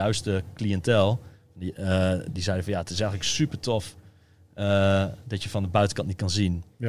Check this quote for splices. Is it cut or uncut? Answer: uncut